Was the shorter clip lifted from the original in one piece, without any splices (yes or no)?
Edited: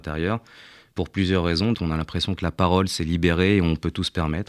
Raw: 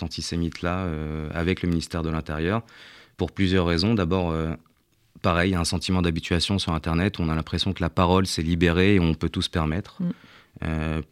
no